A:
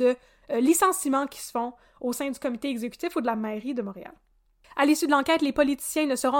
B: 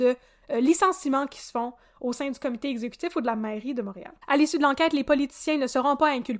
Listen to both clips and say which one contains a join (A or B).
B